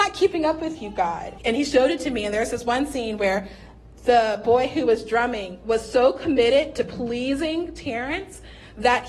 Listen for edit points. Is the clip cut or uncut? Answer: cut